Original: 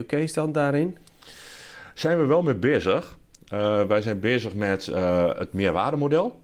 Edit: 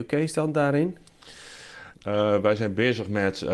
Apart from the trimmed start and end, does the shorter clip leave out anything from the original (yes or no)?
yes